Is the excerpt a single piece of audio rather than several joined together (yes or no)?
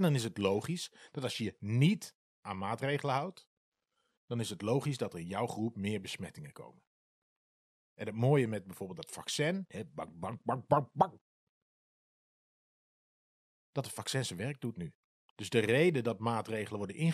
no